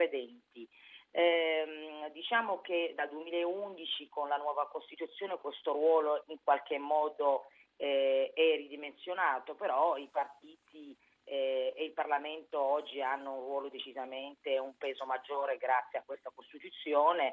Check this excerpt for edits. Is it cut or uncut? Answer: uncut